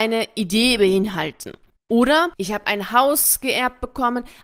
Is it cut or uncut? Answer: cut